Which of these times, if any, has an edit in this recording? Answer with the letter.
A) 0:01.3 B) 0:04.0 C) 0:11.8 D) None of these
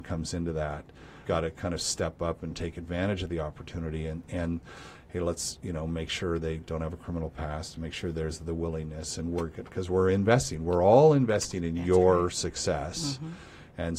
A